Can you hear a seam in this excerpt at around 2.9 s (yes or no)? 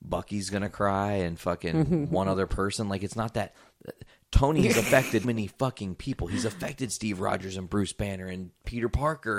no